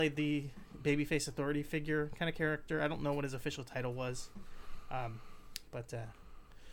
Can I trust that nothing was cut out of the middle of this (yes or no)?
yes